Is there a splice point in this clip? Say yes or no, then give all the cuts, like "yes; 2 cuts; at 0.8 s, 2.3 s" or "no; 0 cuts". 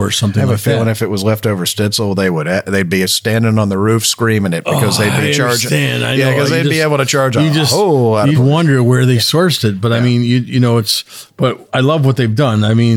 yes; 1 cut; at 8.3 s